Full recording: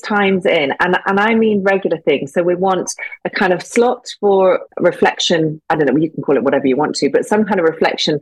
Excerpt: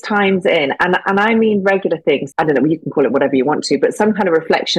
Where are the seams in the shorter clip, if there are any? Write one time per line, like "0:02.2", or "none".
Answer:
0:02.3